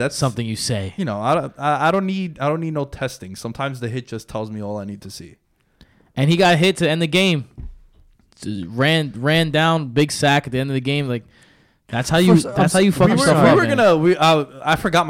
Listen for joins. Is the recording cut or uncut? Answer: uncut